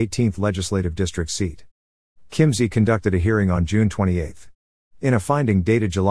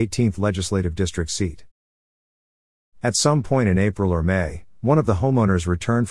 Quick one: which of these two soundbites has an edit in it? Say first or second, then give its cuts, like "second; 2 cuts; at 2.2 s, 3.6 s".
first; 2 cuts; at 2.2 s, 4.9 s